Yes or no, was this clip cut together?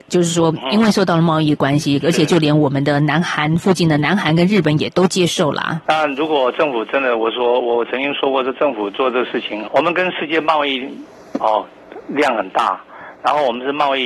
yes